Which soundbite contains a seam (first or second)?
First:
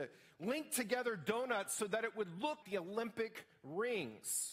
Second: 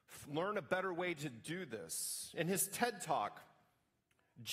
first